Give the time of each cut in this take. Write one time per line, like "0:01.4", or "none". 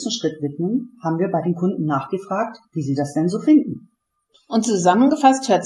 none